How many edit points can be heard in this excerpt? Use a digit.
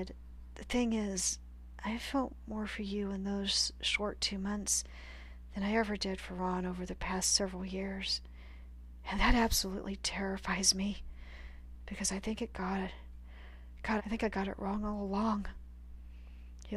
1